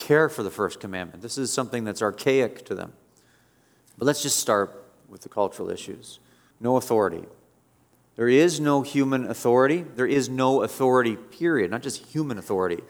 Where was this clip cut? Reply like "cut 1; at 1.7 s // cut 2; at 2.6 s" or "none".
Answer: cut 1; at 3.8 s // cut 2; at 6.5 s